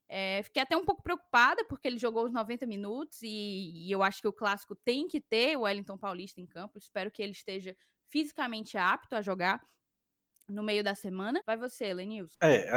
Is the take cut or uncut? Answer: cut